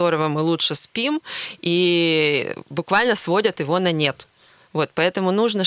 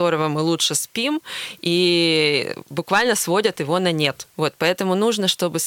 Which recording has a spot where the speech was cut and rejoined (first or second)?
second